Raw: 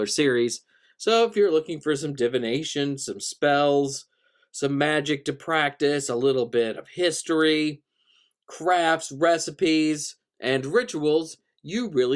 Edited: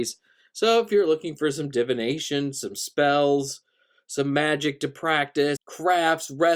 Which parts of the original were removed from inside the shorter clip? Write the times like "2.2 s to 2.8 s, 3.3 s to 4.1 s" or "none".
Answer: 6.0 s to 8.4 s